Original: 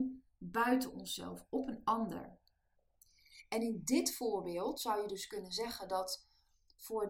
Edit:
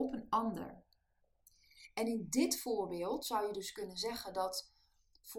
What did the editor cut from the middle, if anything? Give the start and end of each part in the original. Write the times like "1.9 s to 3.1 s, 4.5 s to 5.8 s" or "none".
none